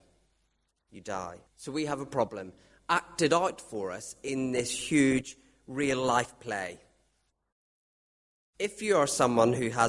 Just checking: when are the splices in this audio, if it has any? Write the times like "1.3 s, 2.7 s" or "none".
1.5 s